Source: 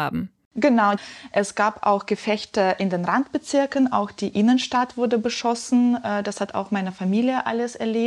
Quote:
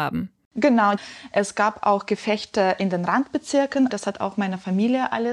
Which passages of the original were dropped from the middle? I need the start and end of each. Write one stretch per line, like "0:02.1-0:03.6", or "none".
0:03.9-0:06.2